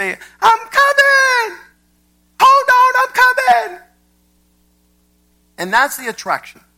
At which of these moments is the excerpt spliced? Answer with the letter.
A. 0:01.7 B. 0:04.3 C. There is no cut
C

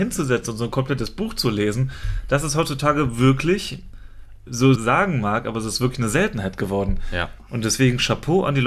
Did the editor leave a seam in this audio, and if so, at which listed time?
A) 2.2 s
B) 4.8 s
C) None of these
B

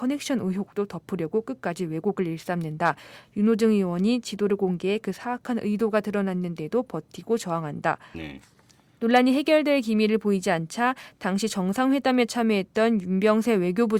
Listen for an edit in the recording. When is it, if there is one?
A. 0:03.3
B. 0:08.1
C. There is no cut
B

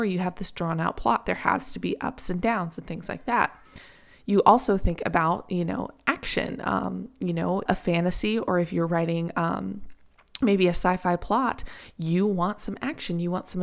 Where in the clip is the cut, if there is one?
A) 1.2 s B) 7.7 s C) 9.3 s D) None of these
B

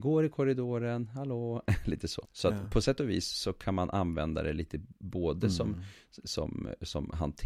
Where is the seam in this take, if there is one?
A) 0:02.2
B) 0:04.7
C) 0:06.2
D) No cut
A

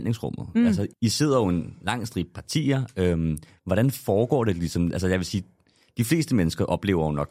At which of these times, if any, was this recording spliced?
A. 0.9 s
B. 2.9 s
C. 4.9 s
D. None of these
A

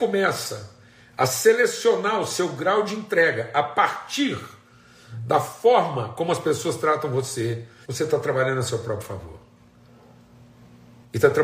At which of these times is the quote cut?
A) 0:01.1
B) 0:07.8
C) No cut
B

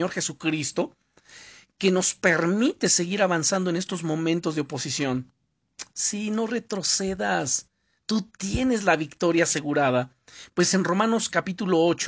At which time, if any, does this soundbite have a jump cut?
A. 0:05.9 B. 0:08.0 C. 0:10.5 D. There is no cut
D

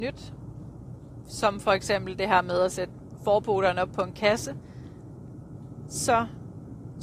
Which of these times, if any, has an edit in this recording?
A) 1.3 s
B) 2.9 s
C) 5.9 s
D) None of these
D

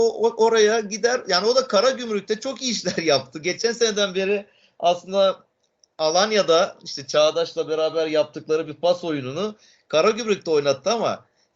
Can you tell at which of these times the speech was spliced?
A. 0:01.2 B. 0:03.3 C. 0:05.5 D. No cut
D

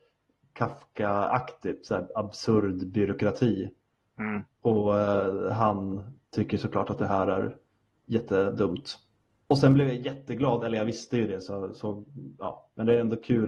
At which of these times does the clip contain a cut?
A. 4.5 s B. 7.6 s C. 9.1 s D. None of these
A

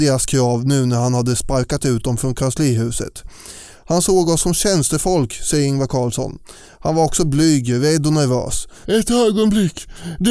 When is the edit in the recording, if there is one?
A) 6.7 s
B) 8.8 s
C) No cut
B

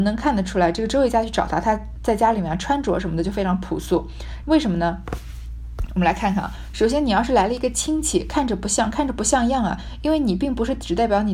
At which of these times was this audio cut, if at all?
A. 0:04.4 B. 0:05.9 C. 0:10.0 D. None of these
A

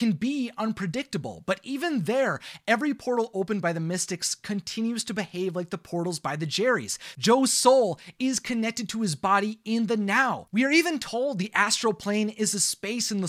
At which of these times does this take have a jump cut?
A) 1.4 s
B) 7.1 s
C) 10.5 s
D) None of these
B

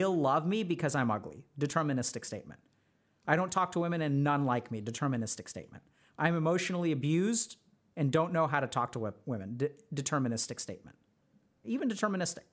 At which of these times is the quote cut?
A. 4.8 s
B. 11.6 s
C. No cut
B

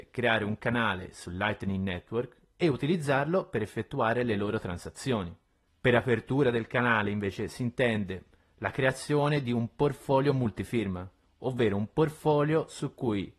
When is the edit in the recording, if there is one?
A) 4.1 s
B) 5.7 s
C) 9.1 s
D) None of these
B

